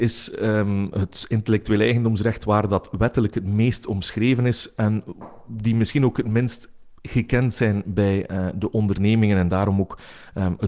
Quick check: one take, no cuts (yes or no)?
yes